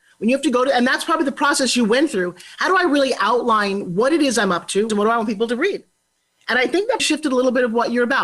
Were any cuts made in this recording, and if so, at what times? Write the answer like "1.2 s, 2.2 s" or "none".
4.9 s, 7.0 s